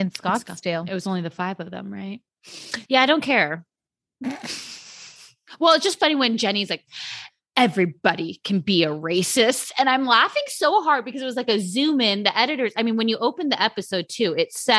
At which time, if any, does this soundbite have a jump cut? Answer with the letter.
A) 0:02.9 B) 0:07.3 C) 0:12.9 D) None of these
A